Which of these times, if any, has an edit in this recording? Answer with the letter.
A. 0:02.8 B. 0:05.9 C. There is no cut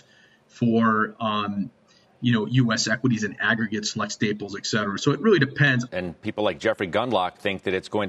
B